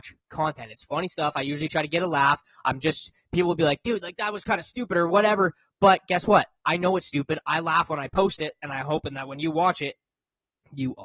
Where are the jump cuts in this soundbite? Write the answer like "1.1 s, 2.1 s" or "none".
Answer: none